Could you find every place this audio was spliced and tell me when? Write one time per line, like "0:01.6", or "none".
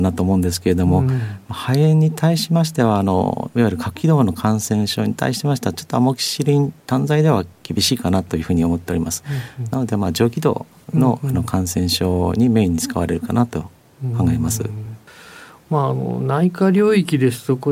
none

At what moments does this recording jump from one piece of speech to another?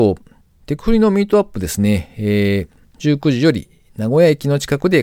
0:02.9

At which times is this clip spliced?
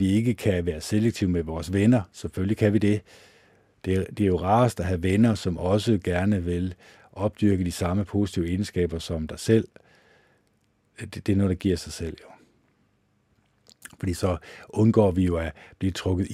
none

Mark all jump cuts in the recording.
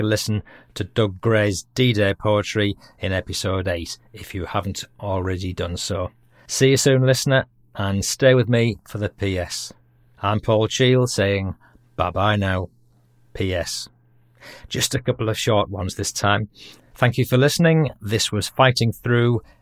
0:16.8

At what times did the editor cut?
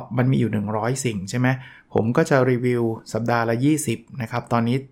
none

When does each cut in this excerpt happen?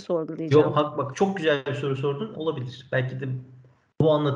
0:02.3

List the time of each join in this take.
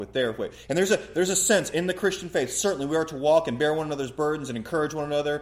none

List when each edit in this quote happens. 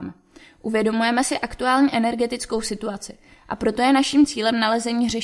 none

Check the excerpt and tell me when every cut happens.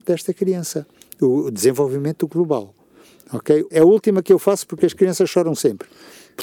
0:03.7

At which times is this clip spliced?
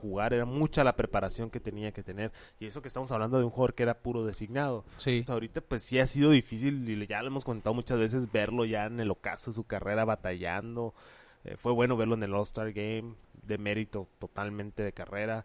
0:05.3

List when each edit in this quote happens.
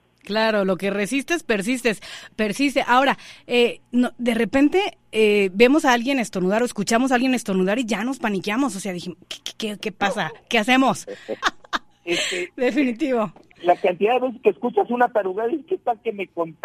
0:11.4
0:13.5

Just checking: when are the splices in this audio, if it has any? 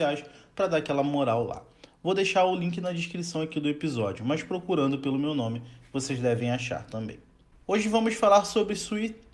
none

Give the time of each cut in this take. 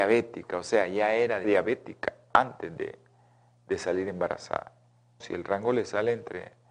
0:01.4
0:05.2

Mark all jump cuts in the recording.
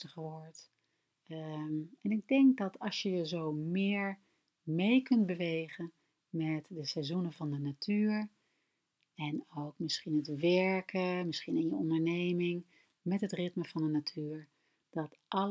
0:01.1

